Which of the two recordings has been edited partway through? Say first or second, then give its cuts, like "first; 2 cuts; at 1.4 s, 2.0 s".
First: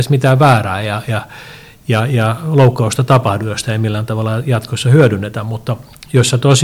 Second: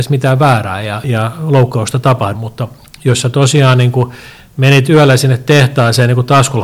second; 2 cuts; at 1.0 s, 2.3 s